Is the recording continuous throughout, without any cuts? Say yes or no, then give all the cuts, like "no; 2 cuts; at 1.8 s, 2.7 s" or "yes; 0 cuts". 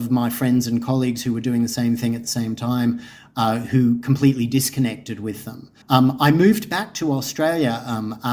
no; 1 cut; at 5.8 s